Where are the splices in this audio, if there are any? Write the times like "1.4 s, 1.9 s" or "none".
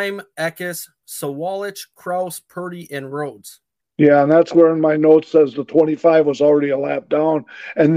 1.0 s